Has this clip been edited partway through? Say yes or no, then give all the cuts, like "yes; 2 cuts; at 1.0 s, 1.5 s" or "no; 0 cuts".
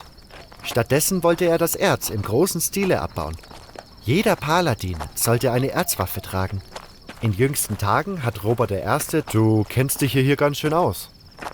yes; 3 cuts; at 5.1 s, 7.1 s, 9.2 s